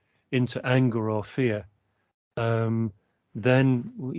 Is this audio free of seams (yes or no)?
yes